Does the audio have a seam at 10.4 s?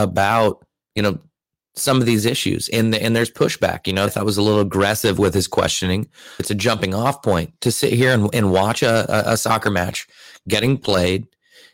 no; 2 cuts; at 4.1 s, 6.4 s

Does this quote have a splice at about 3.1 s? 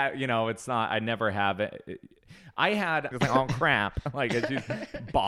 yes; 1 cut; at 3.1 s

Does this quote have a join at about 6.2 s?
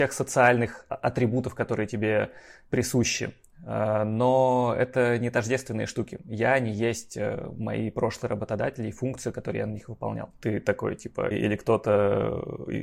no; 2 cuts; at 10.3 s, 11.3 s

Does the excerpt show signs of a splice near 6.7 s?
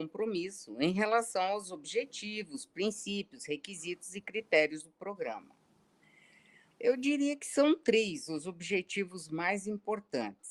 yes; 1 cut; at 6.7 s

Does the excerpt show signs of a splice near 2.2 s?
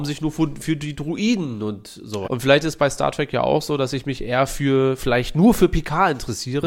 yes; 1 cut; at 2.2 s

